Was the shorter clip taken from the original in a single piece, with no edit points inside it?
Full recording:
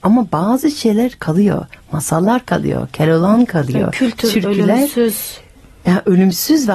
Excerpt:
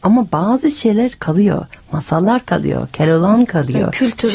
yes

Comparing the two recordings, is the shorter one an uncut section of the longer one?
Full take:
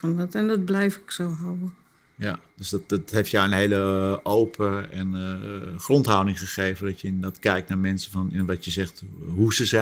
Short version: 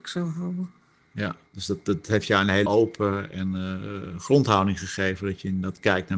no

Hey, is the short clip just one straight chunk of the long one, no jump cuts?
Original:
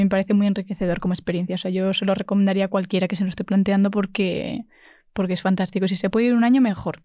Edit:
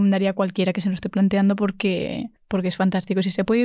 no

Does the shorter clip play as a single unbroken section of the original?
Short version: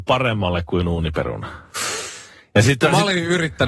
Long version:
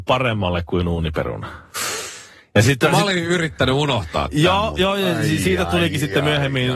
yes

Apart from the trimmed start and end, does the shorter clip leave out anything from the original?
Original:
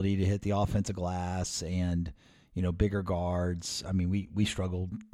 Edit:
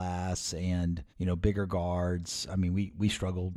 yes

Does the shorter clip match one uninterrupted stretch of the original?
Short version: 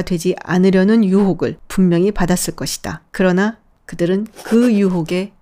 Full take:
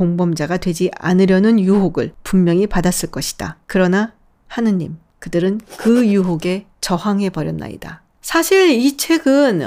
no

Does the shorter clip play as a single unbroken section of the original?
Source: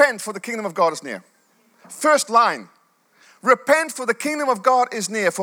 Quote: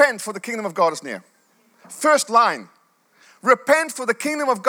yes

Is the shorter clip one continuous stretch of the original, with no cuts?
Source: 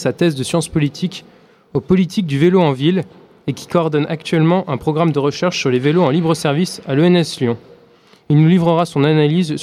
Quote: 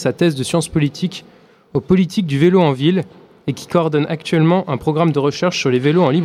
yes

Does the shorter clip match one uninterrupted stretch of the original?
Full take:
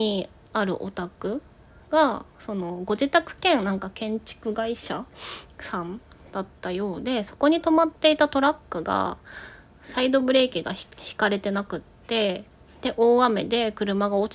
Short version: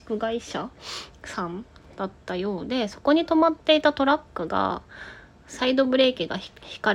yes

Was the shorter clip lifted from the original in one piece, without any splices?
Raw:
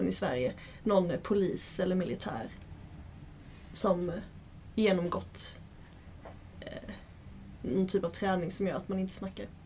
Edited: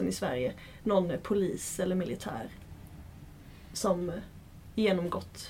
yes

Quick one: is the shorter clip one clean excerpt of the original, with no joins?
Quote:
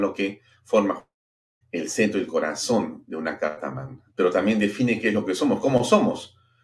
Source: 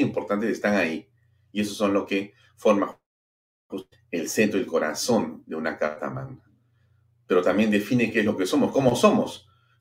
no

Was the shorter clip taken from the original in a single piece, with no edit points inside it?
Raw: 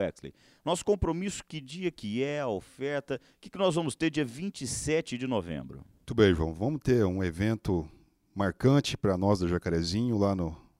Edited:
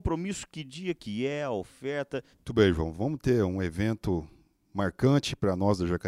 no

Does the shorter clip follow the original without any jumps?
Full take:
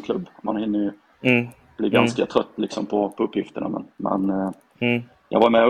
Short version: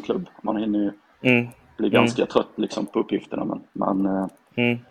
no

